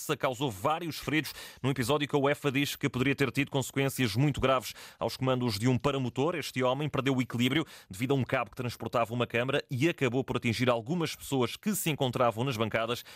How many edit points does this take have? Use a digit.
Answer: 0